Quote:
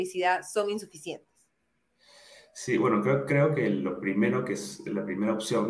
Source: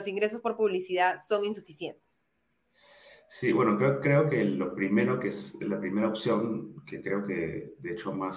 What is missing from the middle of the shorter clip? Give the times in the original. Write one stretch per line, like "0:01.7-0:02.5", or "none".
none